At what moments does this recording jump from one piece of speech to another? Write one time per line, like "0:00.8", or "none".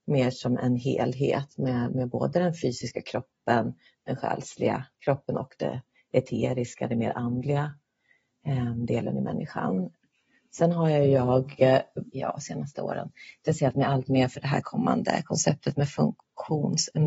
0:12.1